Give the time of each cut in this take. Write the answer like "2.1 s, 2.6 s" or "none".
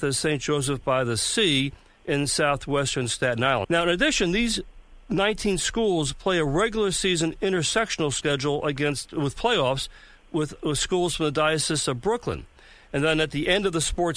3.6 s